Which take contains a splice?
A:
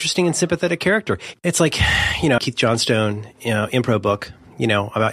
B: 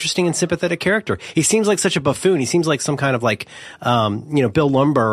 A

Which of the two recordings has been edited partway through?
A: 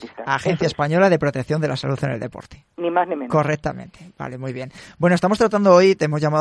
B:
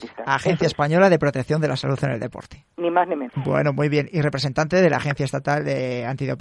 B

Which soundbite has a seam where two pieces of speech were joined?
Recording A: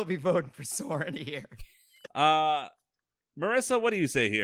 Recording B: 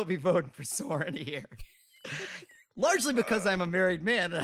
A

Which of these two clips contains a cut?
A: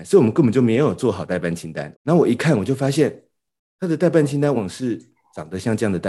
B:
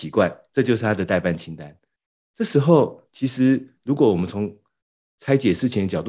A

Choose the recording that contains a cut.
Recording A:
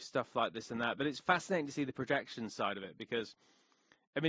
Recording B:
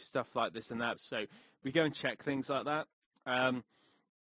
B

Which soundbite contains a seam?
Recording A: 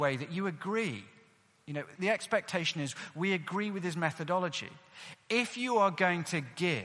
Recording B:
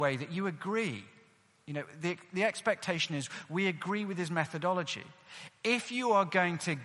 A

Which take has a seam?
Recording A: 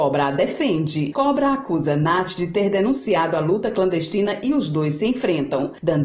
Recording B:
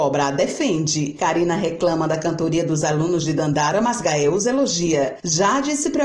A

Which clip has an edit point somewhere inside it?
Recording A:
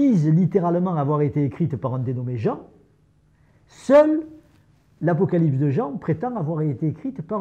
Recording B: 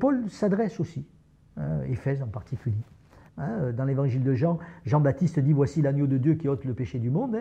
B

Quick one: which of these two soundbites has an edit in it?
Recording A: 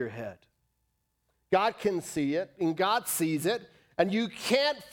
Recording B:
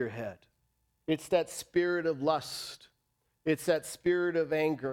B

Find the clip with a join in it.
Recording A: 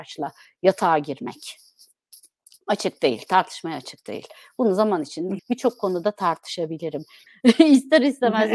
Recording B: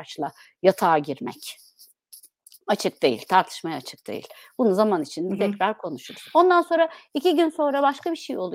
A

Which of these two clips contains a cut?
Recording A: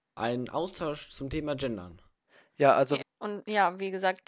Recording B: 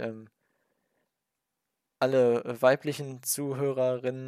A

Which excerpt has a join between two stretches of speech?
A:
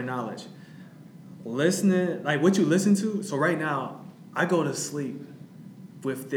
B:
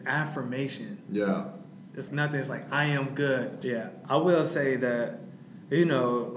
B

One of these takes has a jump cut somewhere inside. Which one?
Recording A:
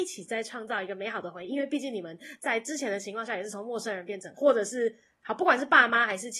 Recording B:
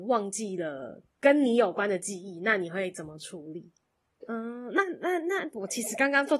B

